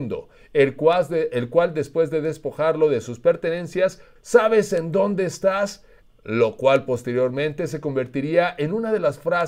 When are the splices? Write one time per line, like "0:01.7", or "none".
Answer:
0:04.2
0:06.0